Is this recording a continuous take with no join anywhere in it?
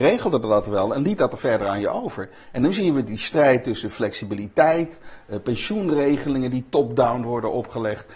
yes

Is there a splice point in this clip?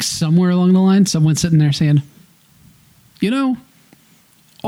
no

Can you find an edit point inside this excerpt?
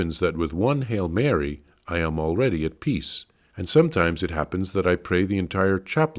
yes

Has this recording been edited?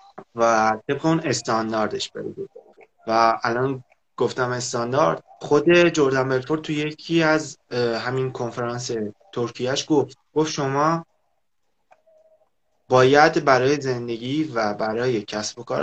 yes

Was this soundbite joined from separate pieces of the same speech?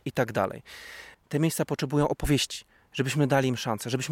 yes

